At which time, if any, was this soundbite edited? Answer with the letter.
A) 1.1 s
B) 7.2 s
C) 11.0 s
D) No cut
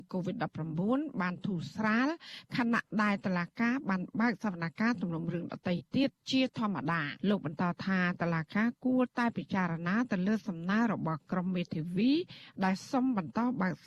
B